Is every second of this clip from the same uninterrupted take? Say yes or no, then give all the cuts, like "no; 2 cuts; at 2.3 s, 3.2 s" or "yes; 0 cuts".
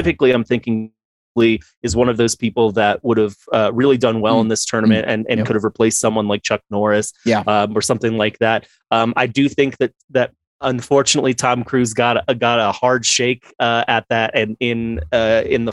no; 1 cut; at 14.6 s